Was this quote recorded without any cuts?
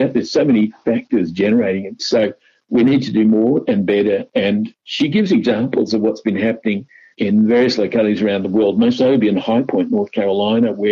no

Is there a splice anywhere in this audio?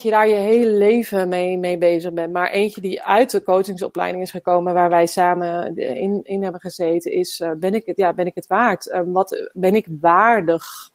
no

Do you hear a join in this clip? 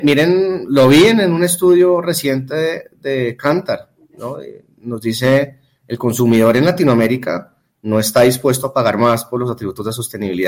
no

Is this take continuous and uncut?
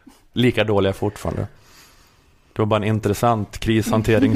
yes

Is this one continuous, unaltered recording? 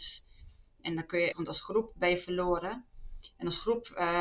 no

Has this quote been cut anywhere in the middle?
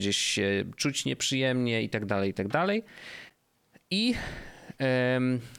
no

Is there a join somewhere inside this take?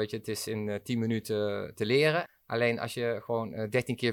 yes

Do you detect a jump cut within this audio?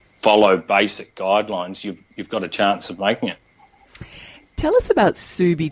no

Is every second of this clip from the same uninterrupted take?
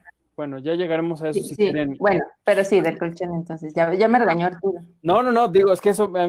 yes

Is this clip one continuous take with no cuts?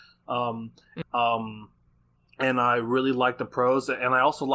no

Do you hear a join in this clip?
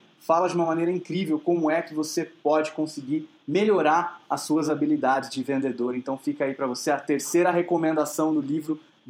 no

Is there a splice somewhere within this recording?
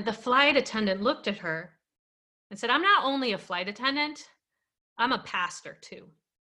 no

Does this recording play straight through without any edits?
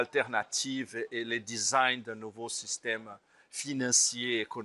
yes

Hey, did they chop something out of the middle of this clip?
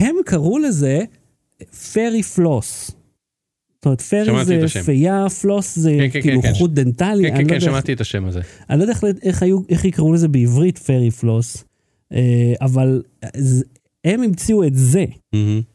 no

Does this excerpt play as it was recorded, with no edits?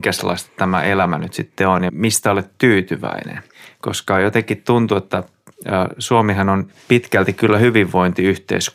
no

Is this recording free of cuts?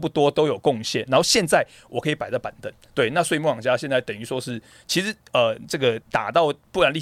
no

